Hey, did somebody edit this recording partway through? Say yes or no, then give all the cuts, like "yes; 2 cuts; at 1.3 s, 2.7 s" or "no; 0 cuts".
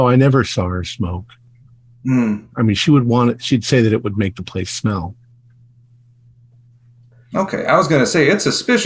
yes; 1 cut; at 2.5 s